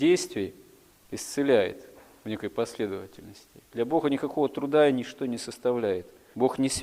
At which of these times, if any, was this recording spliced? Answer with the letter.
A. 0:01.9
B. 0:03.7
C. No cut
B